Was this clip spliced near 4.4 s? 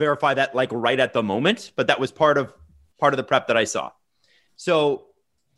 no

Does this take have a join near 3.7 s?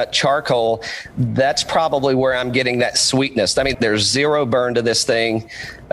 yes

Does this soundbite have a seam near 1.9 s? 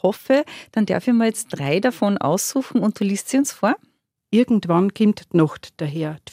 no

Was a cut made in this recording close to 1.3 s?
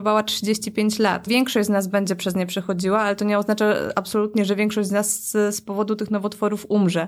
yes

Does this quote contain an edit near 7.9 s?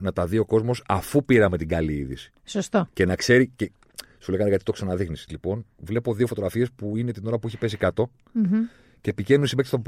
no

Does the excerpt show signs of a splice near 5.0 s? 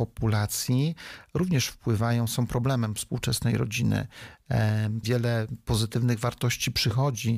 yes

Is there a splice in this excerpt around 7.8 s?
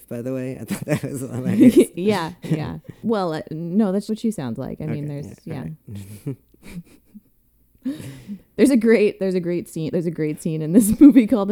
no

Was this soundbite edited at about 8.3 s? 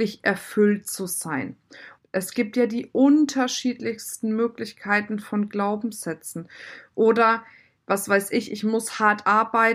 no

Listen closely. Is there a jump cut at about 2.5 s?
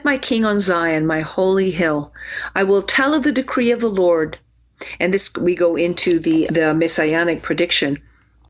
no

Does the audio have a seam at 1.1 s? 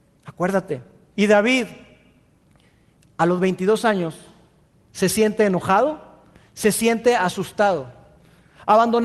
yes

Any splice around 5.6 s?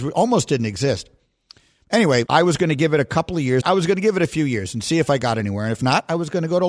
no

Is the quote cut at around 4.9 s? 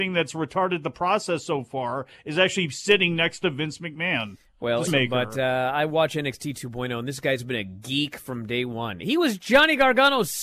yes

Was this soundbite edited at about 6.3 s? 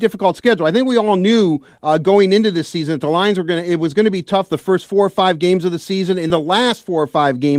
yes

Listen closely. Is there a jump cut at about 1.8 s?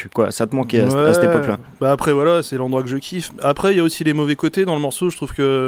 no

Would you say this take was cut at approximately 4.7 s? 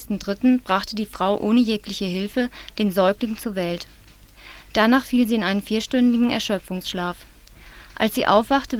no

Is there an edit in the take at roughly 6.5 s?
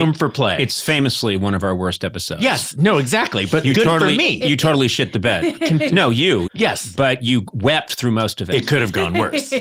yes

